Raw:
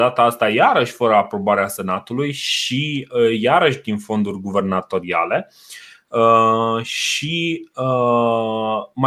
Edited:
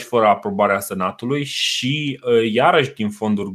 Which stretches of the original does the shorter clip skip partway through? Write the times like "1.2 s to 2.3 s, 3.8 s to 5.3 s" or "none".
none